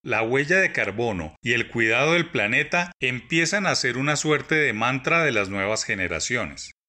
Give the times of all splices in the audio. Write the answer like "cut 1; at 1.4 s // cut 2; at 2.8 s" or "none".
none